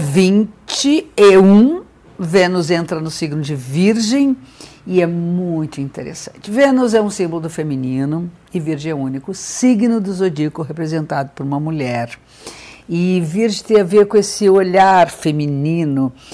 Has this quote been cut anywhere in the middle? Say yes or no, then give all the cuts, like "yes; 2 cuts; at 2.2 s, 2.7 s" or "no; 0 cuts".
no; 0 cuts